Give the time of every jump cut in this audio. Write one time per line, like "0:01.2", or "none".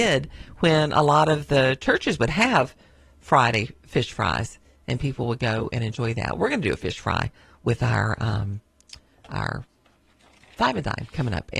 none

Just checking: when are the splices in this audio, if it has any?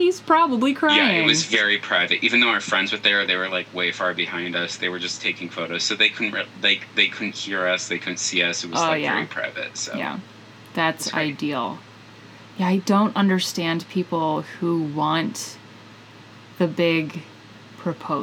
none

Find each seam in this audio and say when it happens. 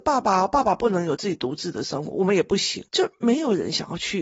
0:02.9

